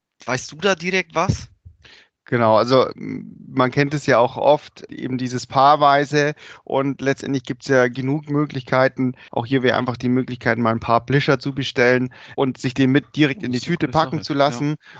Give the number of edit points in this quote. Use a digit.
3